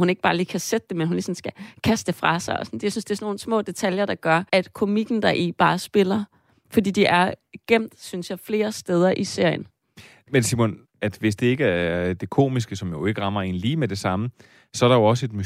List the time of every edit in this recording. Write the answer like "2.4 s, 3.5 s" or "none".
4.5 s, 10.9 s